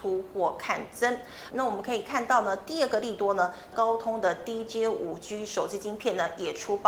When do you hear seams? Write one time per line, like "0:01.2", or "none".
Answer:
0:01.5
0:03.7